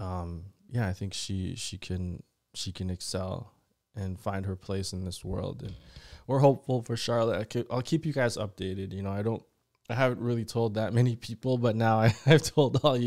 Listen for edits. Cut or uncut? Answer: uncut